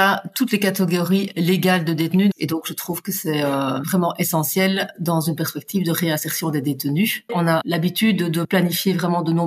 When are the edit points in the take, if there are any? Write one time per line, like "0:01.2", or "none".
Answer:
0:02.3
0:07.3